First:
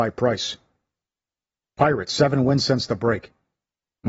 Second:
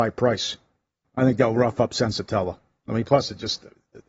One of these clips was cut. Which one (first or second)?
second